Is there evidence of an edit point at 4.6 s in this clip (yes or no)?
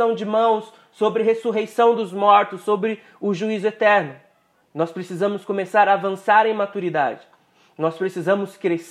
yes